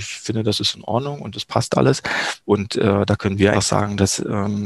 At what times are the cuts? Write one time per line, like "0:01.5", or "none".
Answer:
0:02.4
0:03.5